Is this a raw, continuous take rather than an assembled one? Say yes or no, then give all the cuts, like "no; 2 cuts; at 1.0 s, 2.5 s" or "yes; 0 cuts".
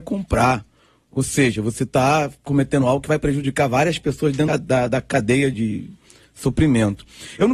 no; 2 cuts; at 4.5 s, 5.5 s